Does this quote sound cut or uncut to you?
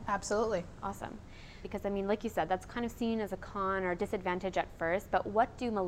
cut